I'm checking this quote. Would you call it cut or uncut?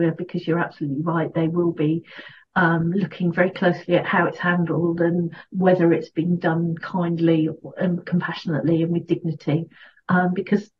uncut